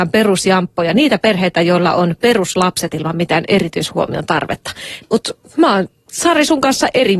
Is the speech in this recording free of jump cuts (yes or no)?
no